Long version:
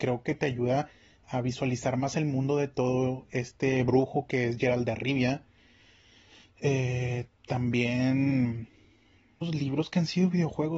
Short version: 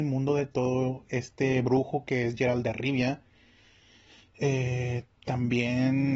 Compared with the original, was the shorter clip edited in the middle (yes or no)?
no